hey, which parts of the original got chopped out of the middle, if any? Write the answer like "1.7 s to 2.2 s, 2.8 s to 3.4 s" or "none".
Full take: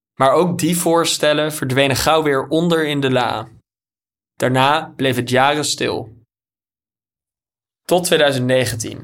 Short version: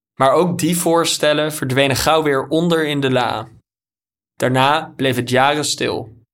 none